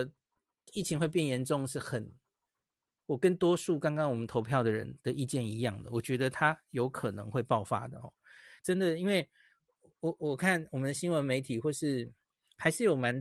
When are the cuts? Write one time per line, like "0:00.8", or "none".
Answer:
0:08.6